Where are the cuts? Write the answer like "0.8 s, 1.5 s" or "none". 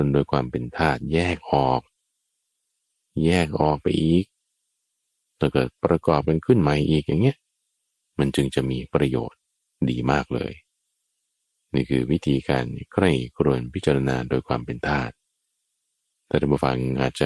none